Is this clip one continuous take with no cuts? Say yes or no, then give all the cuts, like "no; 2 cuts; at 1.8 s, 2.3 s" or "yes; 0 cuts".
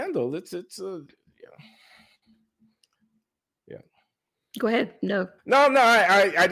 no; 1 cut; at 5.4 s